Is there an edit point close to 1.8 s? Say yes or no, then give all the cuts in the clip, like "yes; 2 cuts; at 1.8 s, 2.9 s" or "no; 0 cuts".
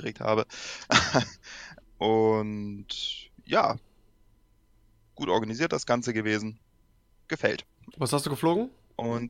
yes; 2 cuts; at 1.8 s, 7.9 s